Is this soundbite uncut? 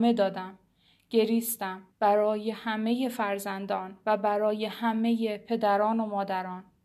no; 1 cut; at 1.9 s

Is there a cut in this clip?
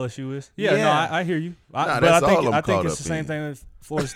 no; 0 cuts

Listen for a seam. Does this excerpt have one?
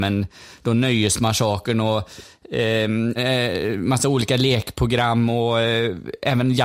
yes; 1 cut; at 3.2 s

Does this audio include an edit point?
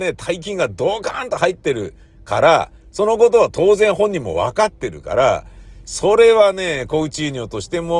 no; 0 cuts

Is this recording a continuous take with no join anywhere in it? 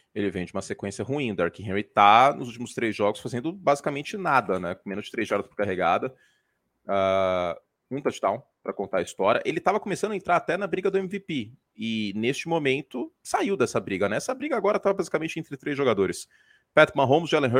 yes; 0 cuts

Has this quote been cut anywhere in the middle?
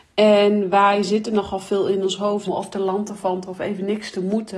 yes; 1 cut; at 2.5 s

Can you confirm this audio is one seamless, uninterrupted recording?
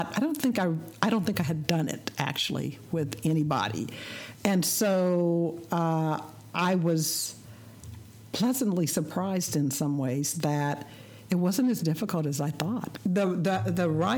no; 1 cut; at 8.3 s

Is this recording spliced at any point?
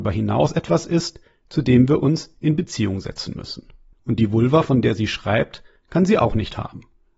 yes; 1 cut; at 3.9 s

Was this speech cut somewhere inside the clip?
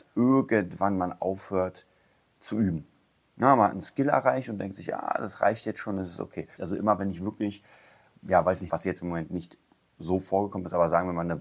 yes; 2 cuts; at 6.6 s, 8.7 s

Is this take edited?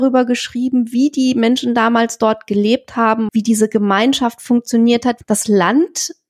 yes; 2 cuts; at 3.3 s, 5.2 s

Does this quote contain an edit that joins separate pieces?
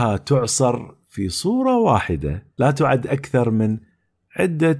yes; 1 cut; at 2.5 s

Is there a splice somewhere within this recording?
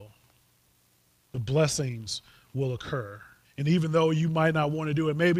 yes; 1 cut; at 3.4 s

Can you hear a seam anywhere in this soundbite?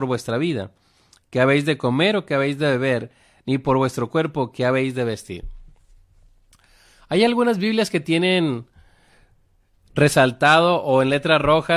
no; 0 cuts

